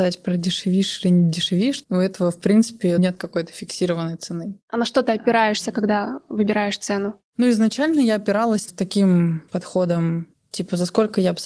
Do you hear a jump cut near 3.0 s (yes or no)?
yes